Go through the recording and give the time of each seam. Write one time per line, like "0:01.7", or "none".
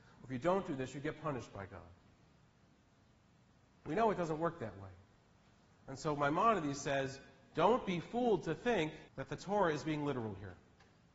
0:03.8
0:09.1